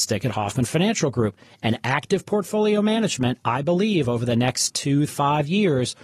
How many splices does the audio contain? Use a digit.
1